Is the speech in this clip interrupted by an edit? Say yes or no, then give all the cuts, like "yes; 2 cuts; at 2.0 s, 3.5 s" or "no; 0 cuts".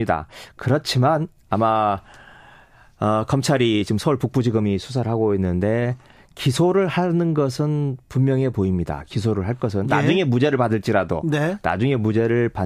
no; 0 cuts